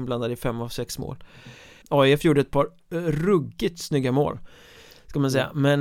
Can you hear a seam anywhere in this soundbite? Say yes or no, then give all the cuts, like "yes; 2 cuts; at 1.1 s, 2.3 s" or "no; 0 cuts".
yes; 1 cut; at 1.8 s